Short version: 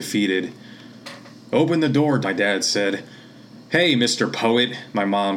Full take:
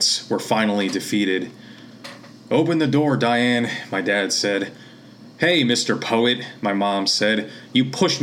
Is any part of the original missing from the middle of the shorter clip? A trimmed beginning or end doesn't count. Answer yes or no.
yes